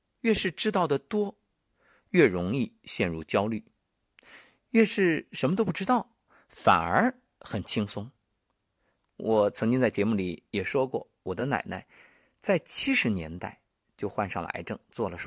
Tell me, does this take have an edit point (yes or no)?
no